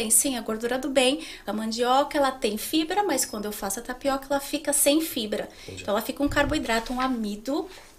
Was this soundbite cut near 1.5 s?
yes; 1 cut; at 1.5 s

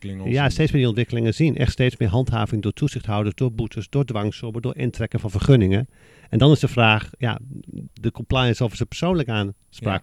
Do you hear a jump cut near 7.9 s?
yes; 1 cut; at 7.9 s

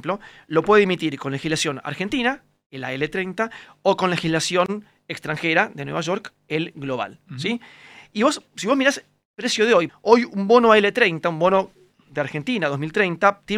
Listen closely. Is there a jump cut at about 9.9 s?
yes; 1 cut; at 9.9 s

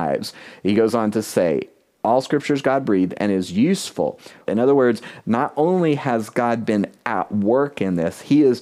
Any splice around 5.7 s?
no; 1 cut; at 4.5 s

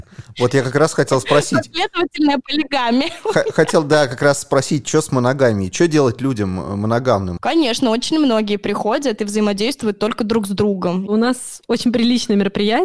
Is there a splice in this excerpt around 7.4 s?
yes; 1 cut; at 7.4 s

